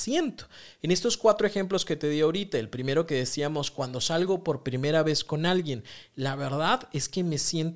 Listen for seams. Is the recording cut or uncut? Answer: uncut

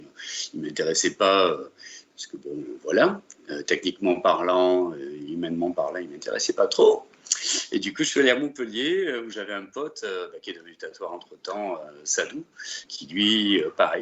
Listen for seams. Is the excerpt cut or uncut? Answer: cut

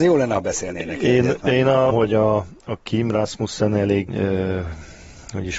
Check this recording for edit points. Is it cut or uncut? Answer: cut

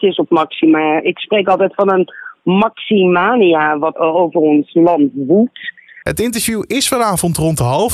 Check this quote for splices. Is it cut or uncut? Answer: cut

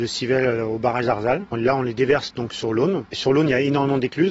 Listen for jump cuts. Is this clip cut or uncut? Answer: uncut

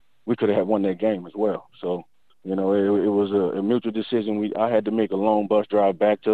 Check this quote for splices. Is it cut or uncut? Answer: uncut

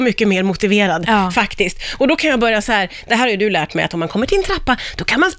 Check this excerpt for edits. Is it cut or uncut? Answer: uncut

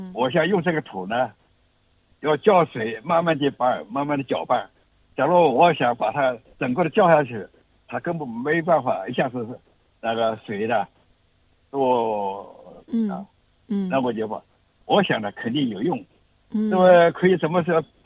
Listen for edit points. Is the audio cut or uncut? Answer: cut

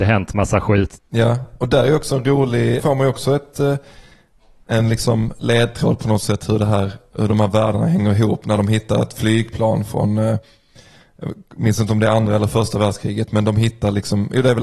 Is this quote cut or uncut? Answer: cut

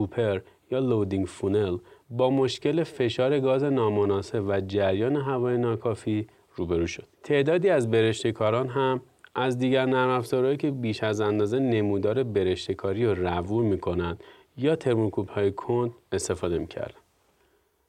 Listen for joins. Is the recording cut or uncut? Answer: cut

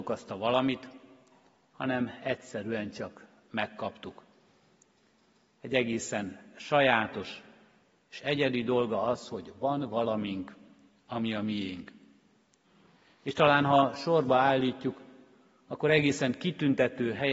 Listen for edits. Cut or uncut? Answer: uncut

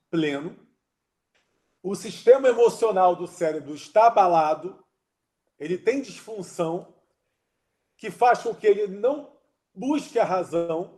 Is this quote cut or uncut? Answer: uncut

